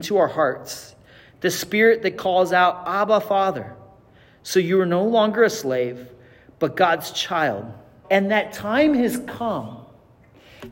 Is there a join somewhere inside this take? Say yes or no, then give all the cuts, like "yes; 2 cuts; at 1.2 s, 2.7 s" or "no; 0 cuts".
yes; 1 cut; at 8.0 s